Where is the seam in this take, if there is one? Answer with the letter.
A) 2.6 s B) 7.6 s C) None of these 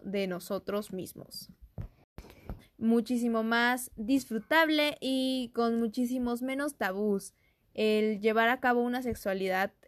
A